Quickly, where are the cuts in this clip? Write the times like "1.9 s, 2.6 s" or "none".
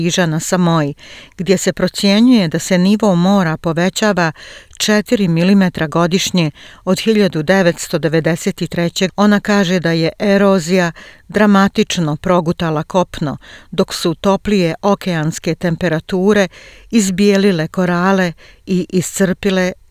9.1 s

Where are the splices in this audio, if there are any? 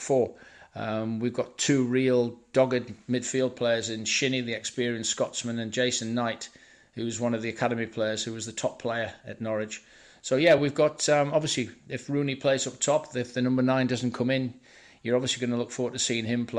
none

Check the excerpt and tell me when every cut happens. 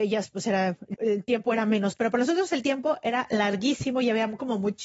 0.9 s

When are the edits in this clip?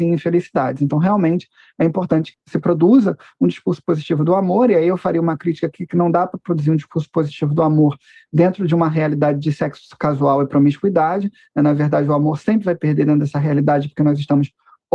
none

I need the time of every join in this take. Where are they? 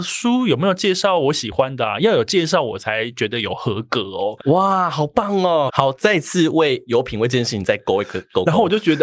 4.4 s, 5.7 s

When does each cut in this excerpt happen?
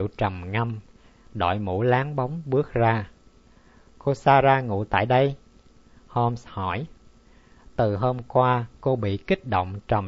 1.2 s, 7.6 s, 8.7 s

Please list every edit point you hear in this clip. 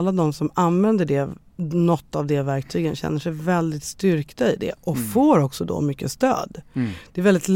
none

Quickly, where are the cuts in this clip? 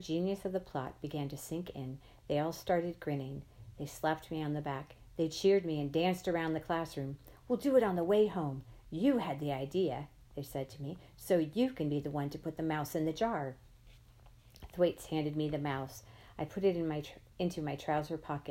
7.4 s

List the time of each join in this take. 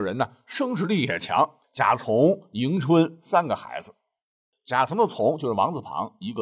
1.6 s, 4.5 s

